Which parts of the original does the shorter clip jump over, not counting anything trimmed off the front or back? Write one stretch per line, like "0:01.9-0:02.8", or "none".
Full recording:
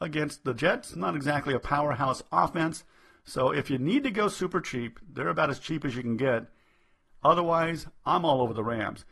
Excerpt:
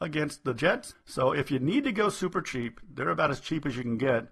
0:00.9-0:03.1